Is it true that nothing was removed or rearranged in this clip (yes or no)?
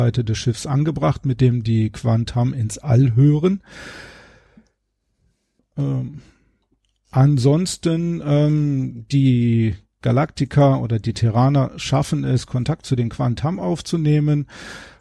no